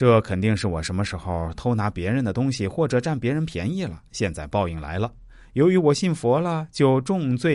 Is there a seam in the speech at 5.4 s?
no; 0 cuts

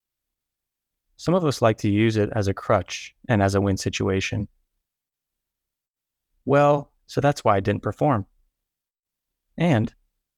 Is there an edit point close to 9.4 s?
no; 2 cuts; at 3.6 s, 7.0 s

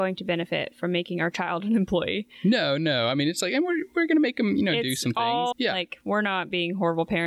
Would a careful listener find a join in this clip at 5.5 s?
yes; 1 cut; at 5.5 s

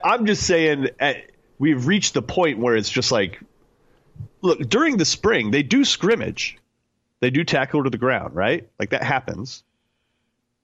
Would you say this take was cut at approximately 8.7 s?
no; 1 cut; at 4.3 s

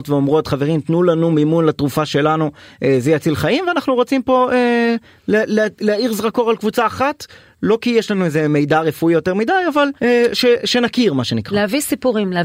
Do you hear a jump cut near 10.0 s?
yes; 1 cut; at 10.0 s

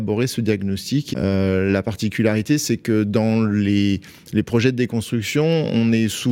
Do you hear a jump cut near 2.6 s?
no; 1 cut; at 1.1 s

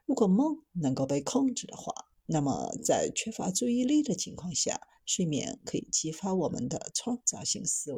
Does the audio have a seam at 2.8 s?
no; 0 cuts

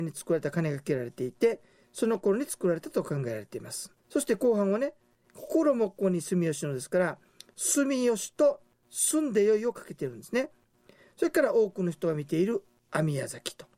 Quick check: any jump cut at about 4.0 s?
yes; 1 cut; at 4.0 s

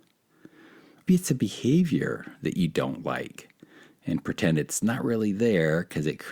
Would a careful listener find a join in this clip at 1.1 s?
yes; 1 cut; at 1.1 s

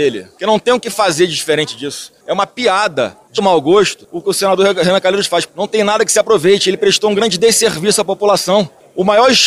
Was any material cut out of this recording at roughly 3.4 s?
yes; 2 cuts; at 3.4 s, 5.5 s

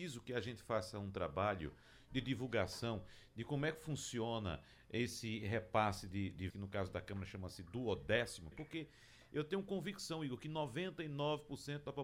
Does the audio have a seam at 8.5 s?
yes; 2 cuts; at 6.5 s, 8.5 s

